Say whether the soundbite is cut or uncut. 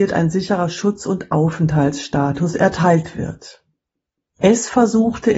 cut